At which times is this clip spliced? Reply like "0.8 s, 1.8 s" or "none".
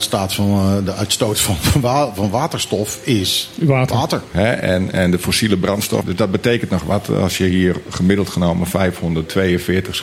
4.3 s, 6.0 s